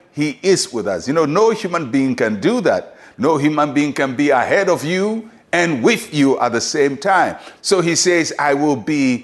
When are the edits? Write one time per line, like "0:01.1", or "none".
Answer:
0:07.6